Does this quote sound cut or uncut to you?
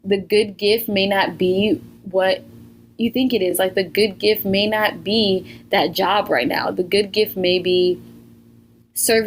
uncut